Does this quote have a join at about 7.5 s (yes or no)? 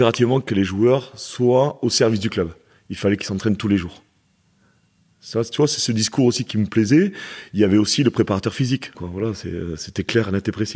no